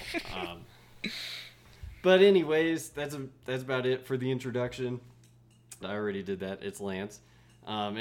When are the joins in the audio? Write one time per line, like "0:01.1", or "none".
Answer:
0:05.8